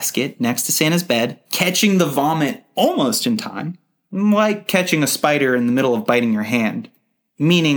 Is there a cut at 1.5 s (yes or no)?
yes